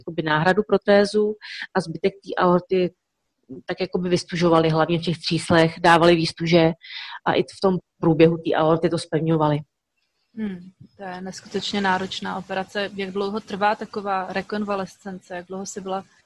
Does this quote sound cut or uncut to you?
uncut